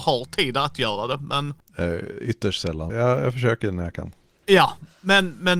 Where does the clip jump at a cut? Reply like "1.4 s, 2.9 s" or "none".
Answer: 2.9 s